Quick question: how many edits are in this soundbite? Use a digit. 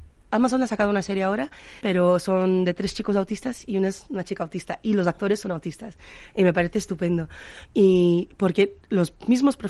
2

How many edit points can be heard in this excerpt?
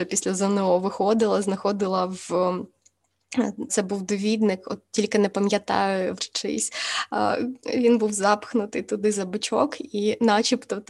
2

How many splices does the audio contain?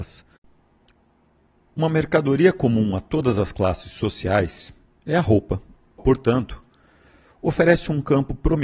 1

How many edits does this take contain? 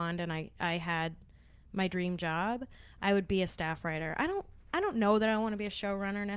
0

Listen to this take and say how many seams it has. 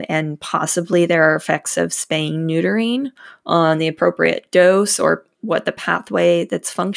0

